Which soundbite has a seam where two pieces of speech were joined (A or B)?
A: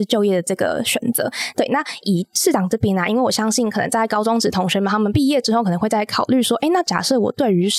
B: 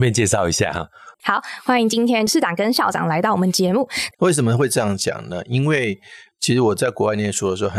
B